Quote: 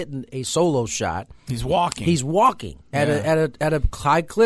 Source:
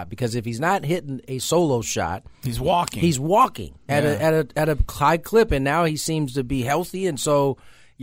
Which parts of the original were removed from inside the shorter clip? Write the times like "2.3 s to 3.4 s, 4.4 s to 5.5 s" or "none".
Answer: none